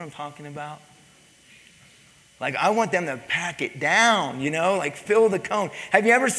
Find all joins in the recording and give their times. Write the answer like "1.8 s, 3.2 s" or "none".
none